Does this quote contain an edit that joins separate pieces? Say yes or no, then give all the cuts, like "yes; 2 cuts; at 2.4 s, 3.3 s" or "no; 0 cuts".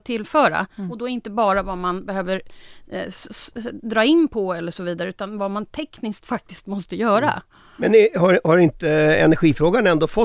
no; 0 cuts